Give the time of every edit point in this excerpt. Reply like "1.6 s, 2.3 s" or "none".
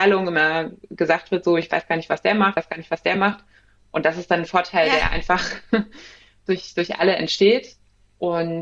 none